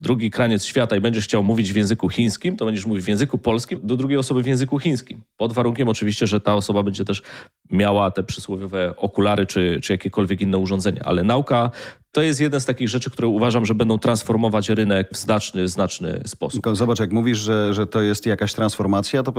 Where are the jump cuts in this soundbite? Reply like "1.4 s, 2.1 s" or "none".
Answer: 3.8 s